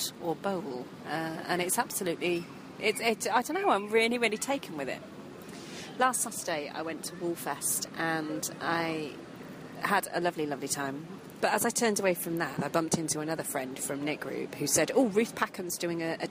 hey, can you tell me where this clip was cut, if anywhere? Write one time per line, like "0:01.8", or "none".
0:11.4
0:12.6